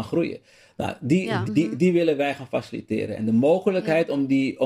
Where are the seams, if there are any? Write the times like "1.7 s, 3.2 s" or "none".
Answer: 1.5 s